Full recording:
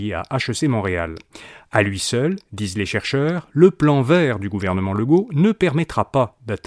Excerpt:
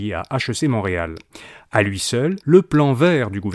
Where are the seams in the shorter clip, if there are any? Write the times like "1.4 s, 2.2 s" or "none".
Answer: 2.4 s